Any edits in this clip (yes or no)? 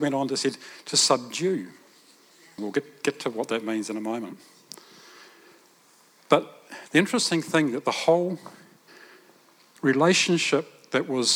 yes